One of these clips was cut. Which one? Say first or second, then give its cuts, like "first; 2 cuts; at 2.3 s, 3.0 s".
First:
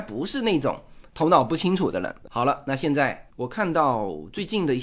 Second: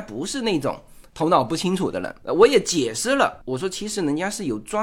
first; 1 cut; at 2.3 s